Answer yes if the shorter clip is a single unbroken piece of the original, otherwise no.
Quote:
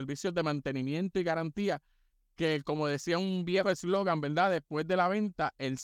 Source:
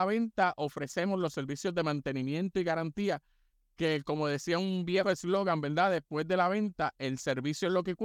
yes